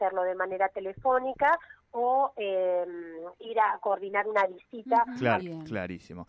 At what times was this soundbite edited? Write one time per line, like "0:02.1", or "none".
0:05.4